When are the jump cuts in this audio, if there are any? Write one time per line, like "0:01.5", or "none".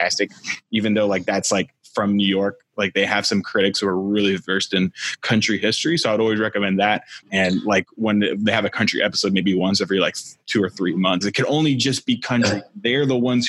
0:07.2
0:11.2